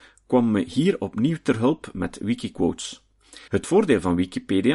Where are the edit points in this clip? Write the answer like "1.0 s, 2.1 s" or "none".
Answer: 3.5 s